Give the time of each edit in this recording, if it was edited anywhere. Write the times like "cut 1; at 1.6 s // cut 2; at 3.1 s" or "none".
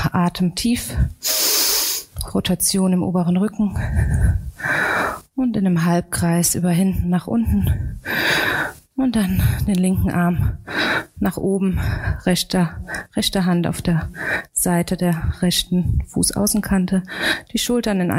none